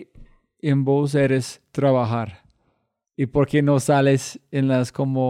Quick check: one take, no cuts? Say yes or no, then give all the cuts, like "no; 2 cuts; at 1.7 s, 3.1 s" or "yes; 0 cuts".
yes; 0 cuts